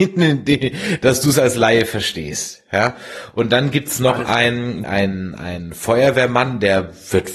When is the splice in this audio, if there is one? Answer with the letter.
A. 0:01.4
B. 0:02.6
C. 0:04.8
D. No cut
C